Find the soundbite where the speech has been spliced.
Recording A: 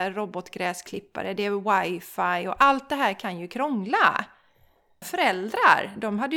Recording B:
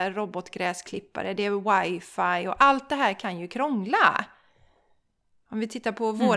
A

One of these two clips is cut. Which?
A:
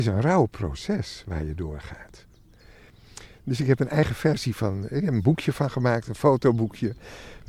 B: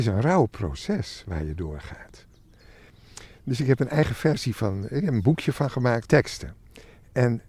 B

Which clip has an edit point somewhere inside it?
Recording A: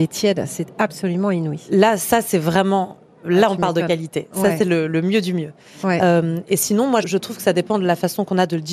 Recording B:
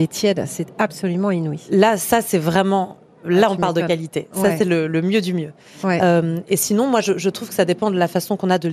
A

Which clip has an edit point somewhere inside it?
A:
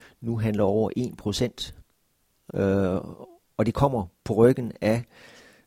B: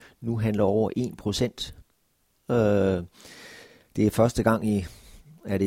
A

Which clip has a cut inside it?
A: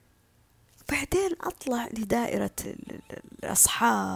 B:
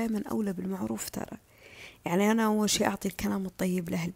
A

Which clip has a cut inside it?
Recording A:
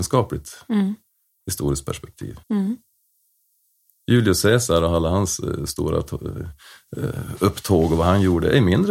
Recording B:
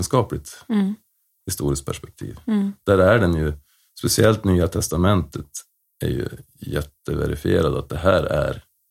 A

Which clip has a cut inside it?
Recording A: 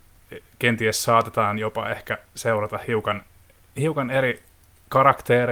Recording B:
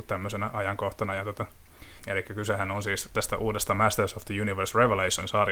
B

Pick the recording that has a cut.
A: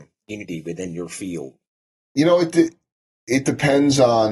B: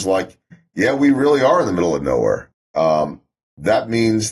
B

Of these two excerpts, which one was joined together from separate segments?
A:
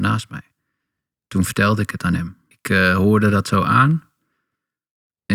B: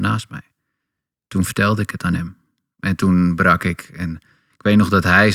A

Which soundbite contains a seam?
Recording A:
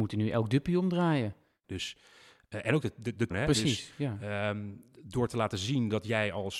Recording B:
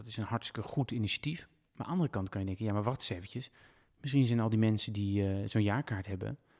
A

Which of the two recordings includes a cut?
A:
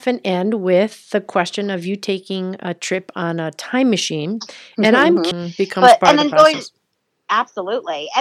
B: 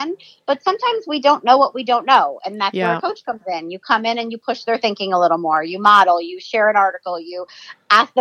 A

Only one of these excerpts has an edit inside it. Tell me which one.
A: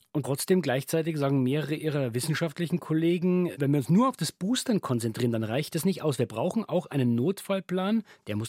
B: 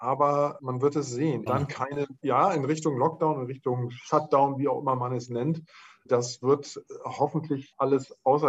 B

